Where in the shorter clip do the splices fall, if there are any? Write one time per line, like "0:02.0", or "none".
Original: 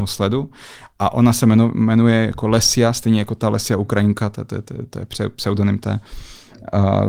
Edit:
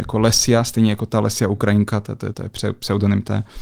0:02.3

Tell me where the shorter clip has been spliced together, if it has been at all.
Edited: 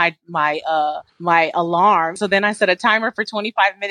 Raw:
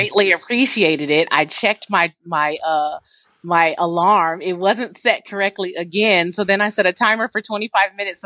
0:01.1
0:02.2

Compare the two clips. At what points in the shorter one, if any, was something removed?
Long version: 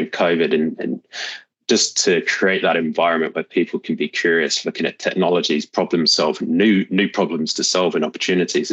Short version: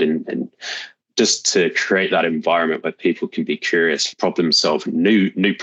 0:04.1

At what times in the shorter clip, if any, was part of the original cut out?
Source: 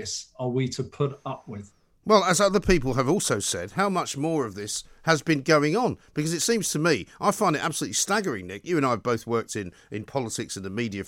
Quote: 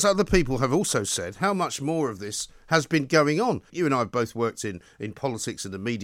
0:03.7

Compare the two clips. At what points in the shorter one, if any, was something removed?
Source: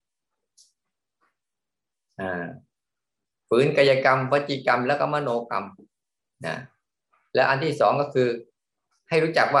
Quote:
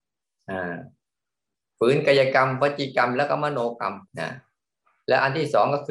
0:04.1

